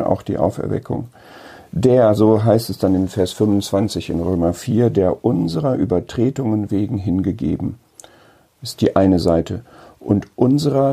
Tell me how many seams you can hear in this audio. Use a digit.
0